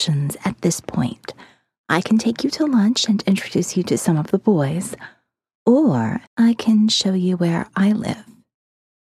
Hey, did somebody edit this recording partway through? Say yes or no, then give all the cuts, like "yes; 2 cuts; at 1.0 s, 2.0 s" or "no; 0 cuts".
yes; 1 cut; at 6.3 s